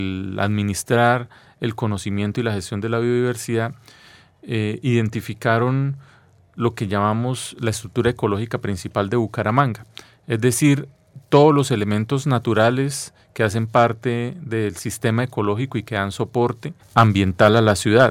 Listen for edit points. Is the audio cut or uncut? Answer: uncut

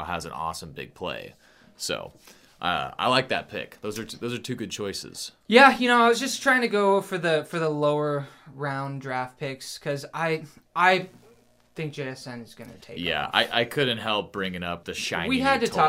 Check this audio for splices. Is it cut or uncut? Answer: cut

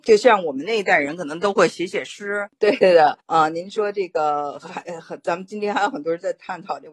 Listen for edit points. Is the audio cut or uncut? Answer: uncut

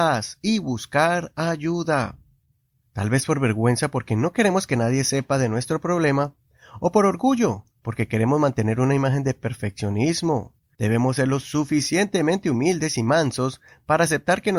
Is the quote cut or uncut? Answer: cut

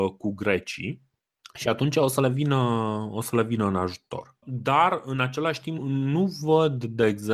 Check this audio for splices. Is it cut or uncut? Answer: cut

